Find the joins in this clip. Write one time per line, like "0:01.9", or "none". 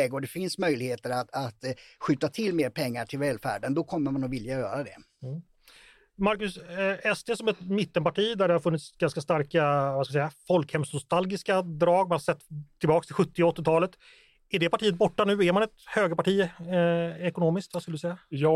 none